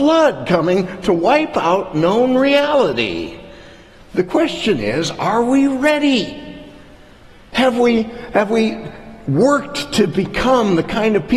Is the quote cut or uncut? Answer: cut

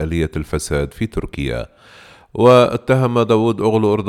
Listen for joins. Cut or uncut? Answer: uncut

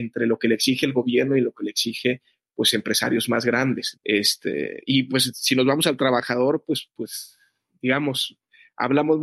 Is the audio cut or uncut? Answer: cut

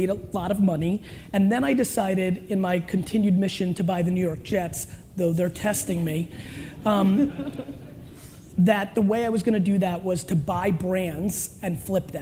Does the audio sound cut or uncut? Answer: uncut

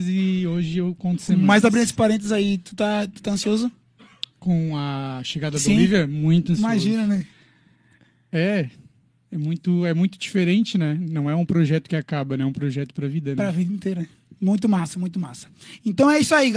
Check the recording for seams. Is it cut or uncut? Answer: uncut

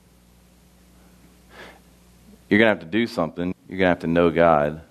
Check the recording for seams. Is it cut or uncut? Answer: cut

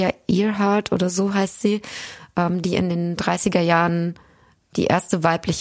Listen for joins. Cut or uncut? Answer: uncut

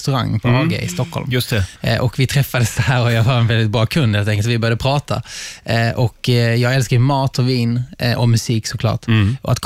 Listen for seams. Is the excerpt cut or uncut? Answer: uncut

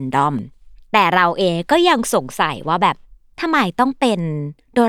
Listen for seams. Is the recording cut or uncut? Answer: uncut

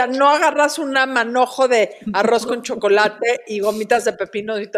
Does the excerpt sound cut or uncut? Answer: uncut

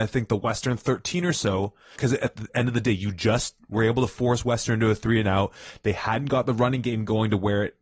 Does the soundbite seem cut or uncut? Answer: cut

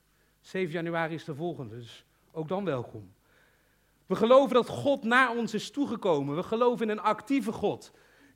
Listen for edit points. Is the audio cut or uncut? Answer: uncut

